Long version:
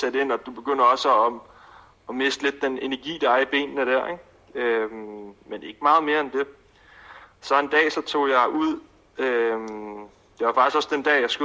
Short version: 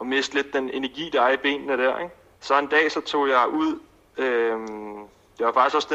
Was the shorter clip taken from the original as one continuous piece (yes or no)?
no